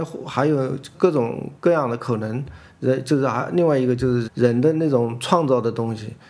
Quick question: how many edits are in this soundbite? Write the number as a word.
one